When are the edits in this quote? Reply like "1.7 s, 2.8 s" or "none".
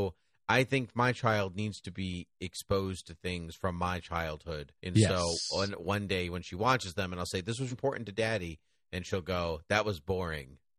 4.8 s, 7.7 s